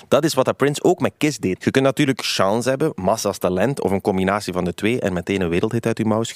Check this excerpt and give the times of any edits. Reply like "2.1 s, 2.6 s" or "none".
1.6 s